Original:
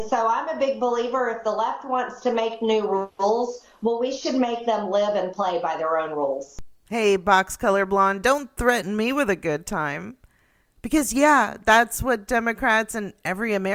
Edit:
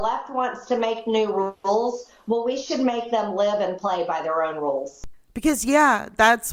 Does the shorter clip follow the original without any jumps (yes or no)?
no